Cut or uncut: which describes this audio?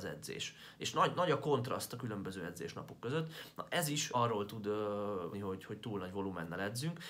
cut